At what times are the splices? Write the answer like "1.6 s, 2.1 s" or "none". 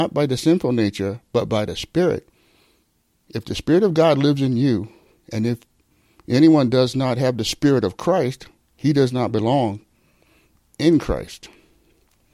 none

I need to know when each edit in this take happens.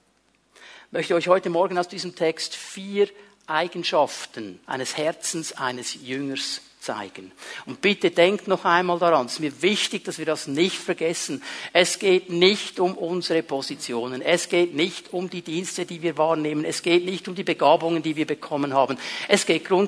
4.6 s

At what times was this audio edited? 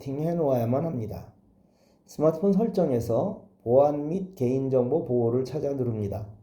none

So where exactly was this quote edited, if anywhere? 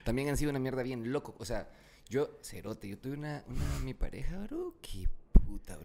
none

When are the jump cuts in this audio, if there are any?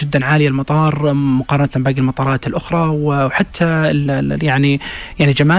4.1 s

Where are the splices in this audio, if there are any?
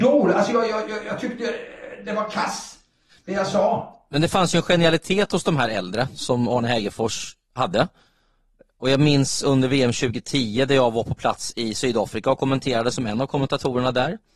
none

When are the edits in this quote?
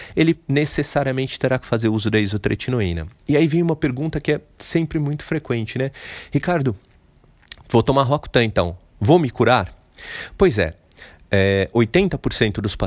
none

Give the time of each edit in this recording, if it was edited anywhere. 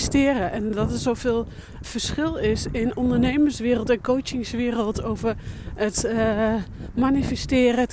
1.8 s

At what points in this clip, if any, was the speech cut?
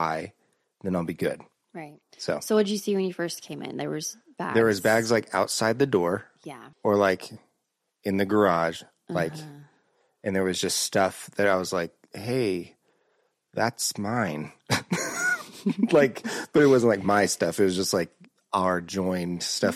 6.7 s

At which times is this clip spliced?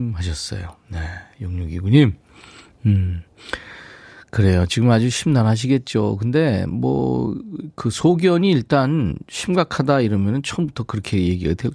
none

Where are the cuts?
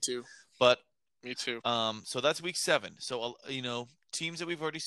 none

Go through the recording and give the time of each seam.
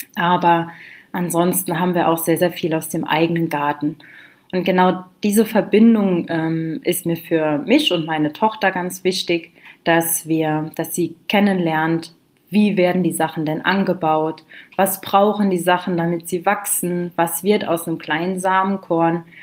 none

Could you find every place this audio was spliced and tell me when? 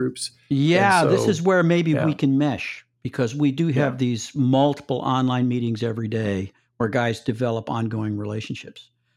none

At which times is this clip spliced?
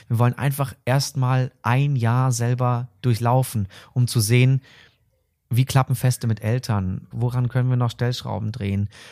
7.1 s

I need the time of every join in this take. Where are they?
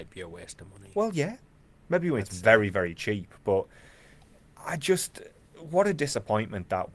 none

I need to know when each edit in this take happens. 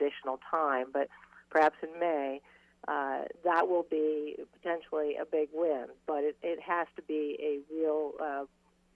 none

